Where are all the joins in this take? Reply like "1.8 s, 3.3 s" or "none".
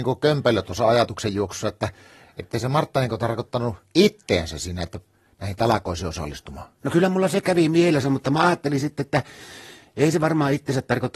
none